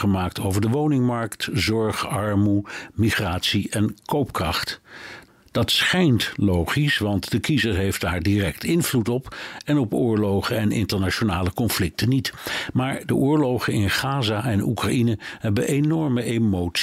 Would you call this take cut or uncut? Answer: uncut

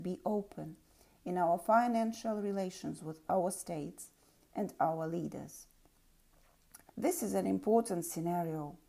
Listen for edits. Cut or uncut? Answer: cut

